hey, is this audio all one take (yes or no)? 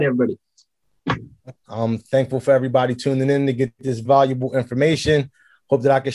no